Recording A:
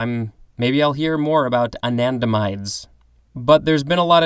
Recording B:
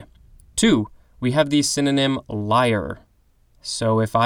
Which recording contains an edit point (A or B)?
A